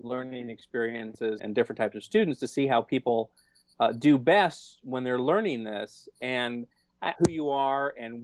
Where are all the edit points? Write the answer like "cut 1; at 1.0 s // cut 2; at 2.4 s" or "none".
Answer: cut 1; at 1.4 s // cut 2; at 7.2 s

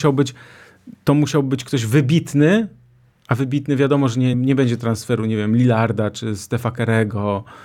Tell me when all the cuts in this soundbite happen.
cut 1; at 4.3 s

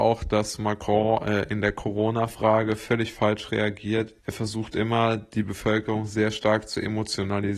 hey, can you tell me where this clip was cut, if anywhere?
cut 1; at 4.2 s

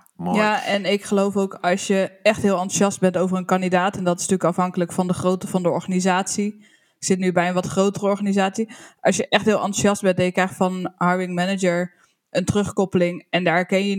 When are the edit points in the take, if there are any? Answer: none

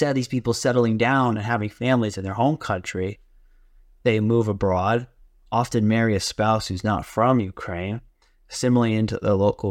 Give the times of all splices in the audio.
none

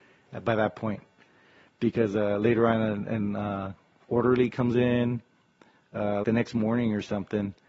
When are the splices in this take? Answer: cut 1; at 6.2 s

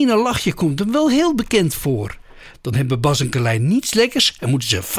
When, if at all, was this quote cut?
cut 1; at 2.5 s

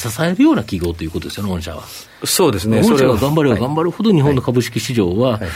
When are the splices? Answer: none

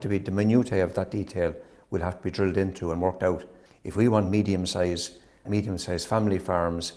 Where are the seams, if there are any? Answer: cut 1; at 3.7 s // cut 2; at 5.4 s

